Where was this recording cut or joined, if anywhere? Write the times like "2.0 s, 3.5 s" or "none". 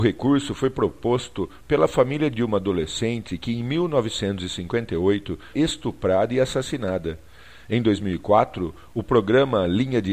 5.5 s